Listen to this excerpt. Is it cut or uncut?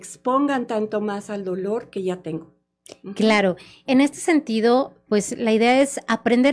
cut